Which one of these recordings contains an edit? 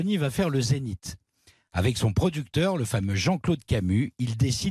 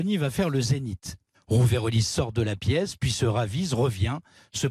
second; 1 cut; at 1.3 s

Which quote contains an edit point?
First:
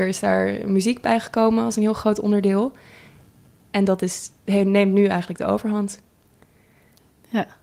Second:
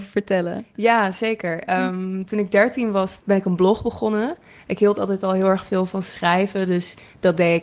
second; 1 cut; at 3.2 s

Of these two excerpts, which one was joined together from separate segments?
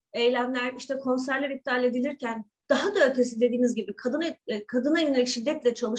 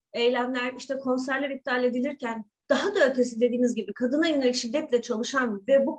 second; 1 cut; at 3.9 s

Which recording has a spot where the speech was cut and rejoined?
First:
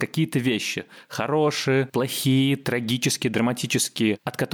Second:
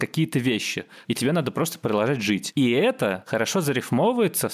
second; 1 cut; at 1.0 s

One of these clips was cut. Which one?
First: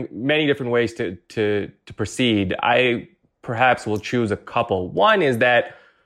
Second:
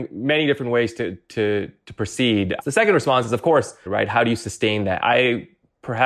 second; 3 cuts; at 2.6 s, 3.9 s, 5.0 s

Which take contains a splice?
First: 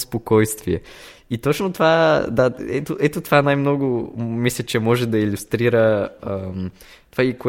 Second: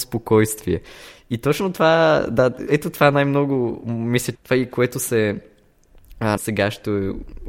second; 3 cuts; at 2.7 s, 4.3 s, 6.4 s

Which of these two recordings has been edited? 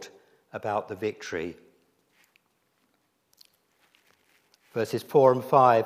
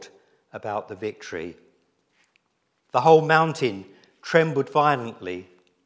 second; 1 cut; at 2.8 s

